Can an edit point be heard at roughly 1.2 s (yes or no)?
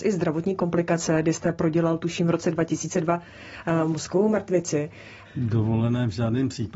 no